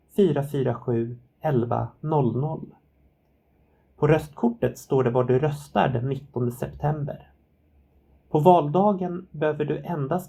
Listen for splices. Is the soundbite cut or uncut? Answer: uncut